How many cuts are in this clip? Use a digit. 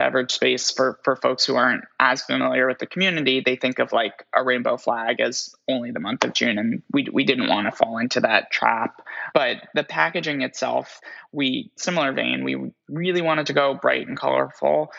0